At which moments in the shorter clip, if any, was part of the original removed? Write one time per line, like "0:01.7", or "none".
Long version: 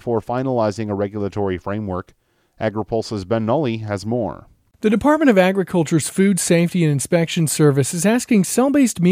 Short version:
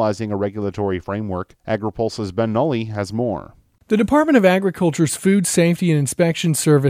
0:01.6